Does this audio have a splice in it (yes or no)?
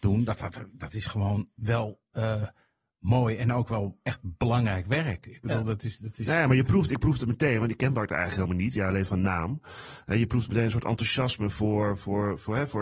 no